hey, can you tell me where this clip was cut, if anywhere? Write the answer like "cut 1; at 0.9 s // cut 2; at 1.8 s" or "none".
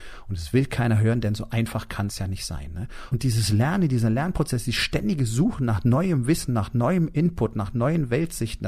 cut 1; at 3.1 s